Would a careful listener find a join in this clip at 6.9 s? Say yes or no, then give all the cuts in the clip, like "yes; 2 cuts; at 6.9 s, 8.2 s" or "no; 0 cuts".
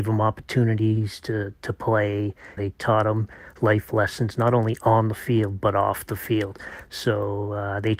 yes; 2 cuts; at 2.6 s, 6.9 s